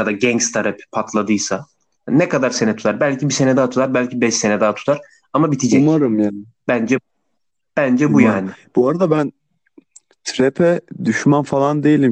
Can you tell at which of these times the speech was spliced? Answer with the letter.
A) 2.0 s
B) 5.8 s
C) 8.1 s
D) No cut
A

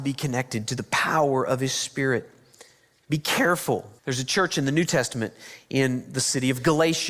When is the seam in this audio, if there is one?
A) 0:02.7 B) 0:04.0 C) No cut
B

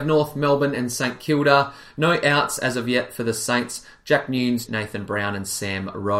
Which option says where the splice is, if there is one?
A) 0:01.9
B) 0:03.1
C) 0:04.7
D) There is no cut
C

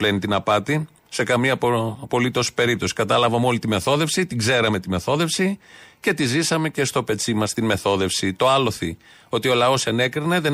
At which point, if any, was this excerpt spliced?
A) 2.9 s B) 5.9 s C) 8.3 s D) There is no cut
D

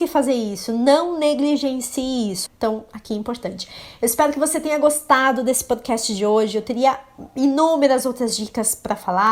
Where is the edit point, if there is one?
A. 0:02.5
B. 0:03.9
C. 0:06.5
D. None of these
A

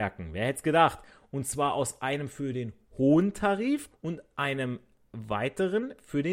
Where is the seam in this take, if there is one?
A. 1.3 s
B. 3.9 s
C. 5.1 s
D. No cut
B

